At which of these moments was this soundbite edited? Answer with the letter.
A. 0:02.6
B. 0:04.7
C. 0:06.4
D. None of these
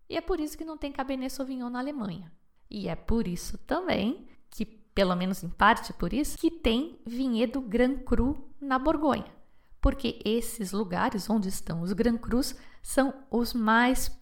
C